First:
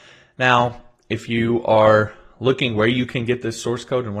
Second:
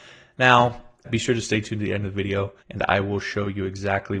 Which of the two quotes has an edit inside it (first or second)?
second